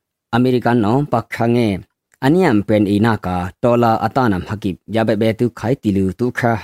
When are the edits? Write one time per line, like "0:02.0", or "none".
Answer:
none